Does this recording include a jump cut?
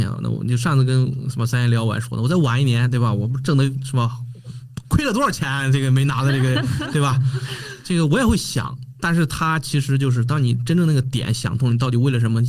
no; 0 cuts

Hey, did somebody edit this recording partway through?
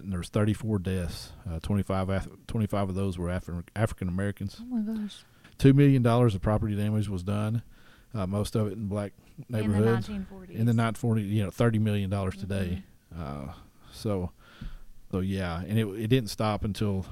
yes; 2 cuts; at 5.4 s, 15.1 s

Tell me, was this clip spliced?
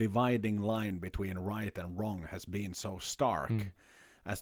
no; 0 cuts

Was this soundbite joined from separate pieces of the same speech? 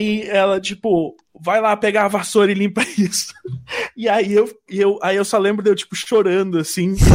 no; 0 cuts

